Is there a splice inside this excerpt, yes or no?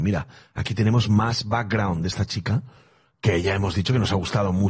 no